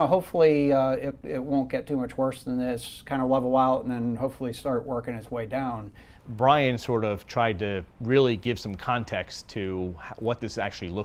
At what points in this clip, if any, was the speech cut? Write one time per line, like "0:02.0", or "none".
0:07.9